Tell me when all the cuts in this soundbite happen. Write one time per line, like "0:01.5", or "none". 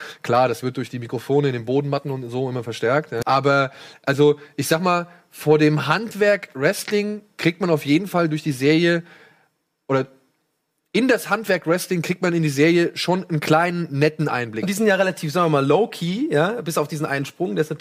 0:03.2
0:14.6

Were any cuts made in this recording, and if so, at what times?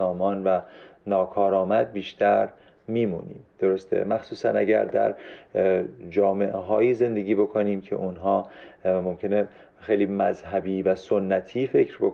0:03.5

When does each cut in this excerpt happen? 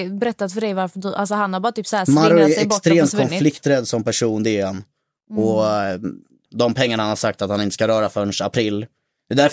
0:06.5

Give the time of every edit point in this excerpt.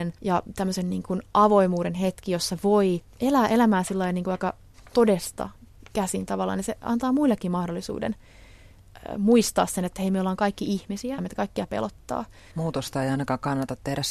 0:11.2
0:12.5

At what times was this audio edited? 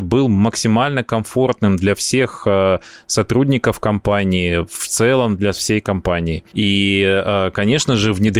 0:06.5

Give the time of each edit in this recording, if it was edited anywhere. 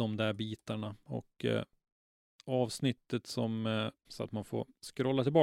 0:04.0

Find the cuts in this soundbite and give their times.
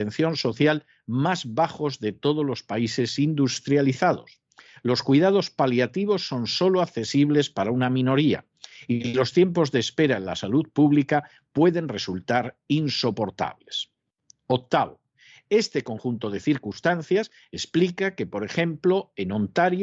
none

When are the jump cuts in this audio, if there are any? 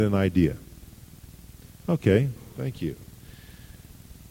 none

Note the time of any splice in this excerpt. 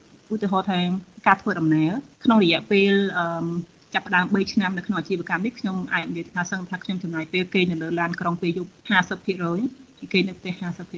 0:02.1
0:08.8

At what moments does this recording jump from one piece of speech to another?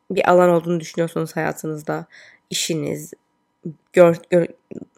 none

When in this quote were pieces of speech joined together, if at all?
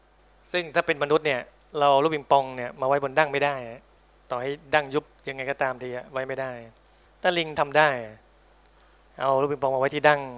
none

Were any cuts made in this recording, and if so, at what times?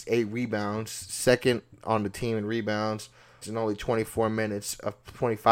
0:03.4

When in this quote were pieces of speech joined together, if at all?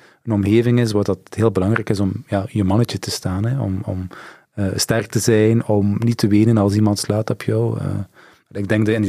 none

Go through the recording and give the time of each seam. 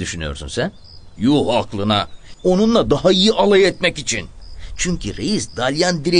0:01.2
0:02.3

